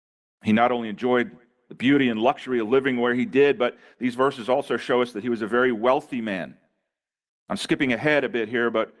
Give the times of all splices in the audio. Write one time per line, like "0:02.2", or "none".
none